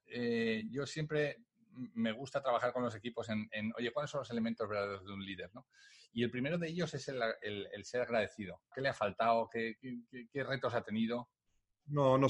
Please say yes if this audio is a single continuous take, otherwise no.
no